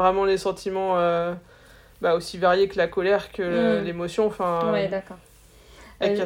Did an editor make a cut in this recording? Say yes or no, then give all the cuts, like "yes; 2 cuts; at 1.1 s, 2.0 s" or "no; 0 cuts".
no; 0 cuts